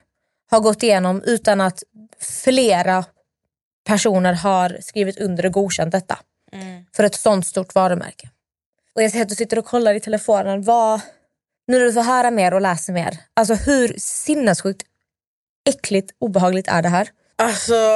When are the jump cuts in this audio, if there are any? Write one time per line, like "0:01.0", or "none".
none